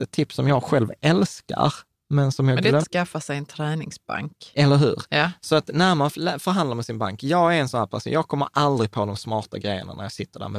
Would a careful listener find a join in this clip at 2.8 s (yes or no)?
yes